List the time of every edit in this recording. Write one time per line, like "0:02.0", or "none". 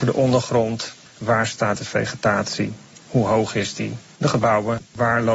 none